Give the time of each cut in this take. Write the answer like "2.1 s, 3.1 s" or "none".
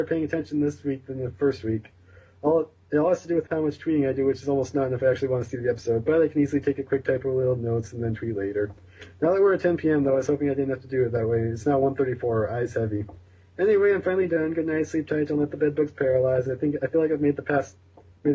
none